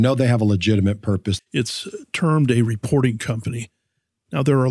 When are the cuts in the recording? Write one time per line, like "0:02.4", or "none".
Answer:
0:01.4